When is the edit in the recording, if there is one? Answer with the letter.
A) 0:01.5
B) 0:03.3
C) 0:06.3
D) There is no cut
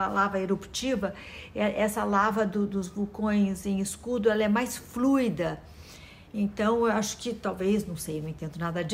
D